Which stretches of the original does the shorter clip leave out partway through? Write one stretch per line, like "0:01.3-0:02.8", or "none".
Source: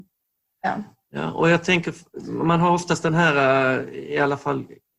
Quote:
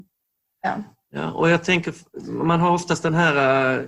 none